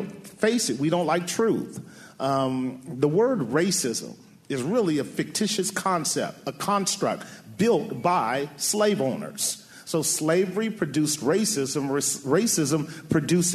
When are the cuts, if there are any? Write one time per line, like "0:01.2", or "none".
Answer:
none

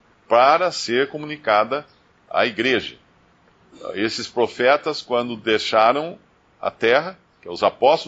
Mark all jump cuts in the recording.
none

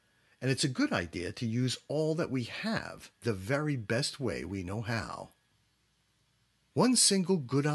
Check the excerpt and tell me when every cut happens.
none

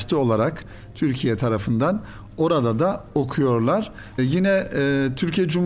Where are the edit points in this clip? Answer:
0:04.2

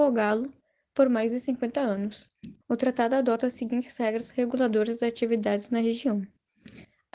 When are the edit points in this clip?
0:02.6

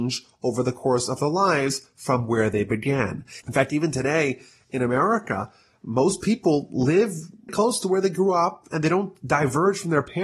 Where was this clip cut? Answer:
0:03.4
0:07.5

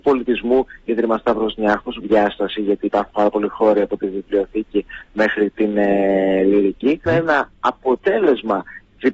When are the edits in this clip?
0:02.0
0:07.1

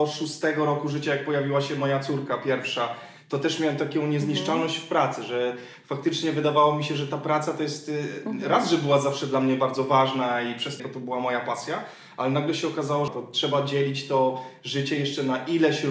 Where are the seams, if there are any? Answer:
0:10.8
0:13.1

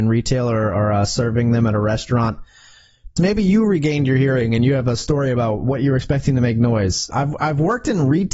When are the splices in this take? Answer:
0:03.2
0:07.1

